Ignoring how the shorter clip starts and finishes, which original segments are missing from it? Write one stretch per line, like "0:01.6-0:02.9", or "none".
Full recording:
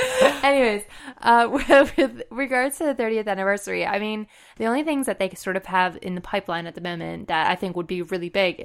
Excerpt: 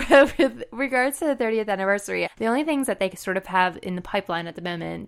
0:03.8-0:04.5